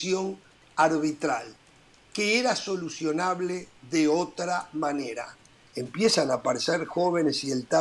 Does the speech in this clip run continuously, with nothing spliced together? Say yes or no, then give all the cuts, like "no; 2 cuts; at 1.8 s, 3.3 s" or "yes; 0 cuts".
no; 1 cut; at 5.7 s